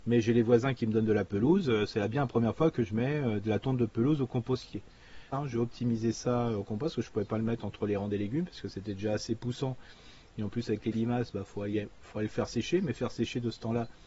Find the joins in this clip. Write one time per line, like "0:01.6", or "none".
0:05.3